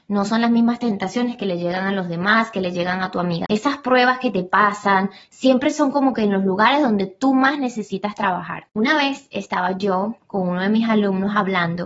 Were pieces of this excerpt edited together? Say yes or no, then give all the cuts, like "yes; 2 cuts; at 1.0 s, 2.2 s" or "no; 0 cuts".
yes; 2 cuts; at 3.4 s, 8.7 s